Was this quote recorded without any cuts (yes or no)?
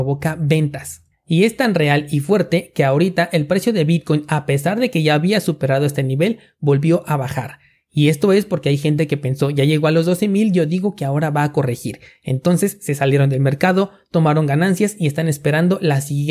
yes